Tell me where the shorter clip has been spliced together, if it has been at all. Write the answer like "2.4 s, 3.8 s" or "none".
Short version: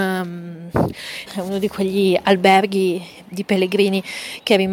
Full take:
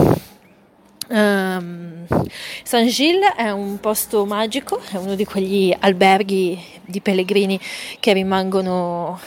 1.3 s